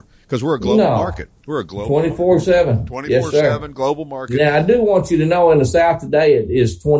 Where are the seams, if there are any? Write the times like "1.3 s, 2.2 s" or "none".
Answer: 1.4 s